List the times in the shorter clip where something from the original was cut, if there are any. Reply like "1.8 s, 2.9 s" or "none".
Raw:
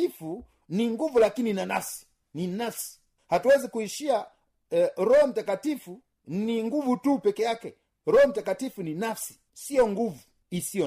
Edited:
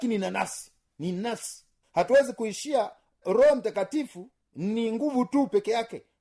3.2 s